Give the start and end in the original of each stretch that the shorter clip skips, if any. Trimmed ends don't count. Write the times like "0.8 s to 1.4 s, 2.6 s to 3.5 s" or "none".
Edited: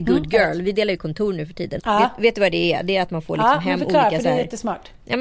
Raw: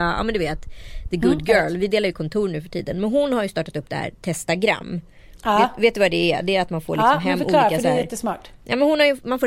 2.9 s to 5.4 s